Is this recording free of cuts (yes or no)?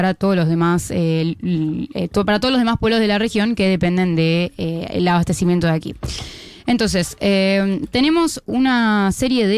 yes